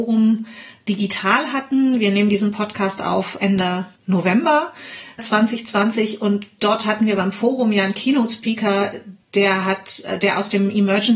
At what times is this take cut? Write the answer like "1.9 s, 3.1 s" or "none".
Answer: 9.2 s